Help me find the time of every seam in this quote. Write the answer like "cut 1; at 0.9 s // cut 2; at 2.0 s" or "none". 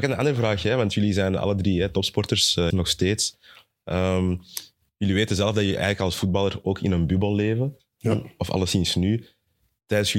cut 1; at 2.7 s